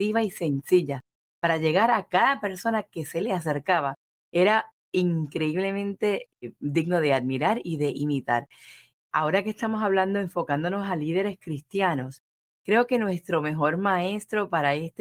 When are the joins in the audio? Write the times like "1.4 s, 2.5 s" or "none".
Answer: 8.9 s